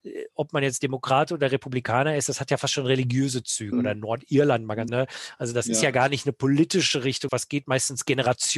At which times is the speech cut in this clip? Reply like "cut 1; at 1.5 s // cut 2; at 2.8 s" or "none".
cut 1; at 3.7 s // cut 2; at 4.9 s // cut 3; at 7.3 s